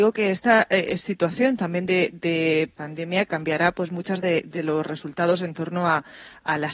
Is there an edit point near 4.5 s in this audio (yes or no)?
yes